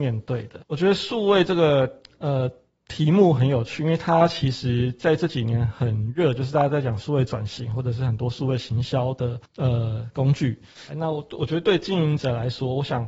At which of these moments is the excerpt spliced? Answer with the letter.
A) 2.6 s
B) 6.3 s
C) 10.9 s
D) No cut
C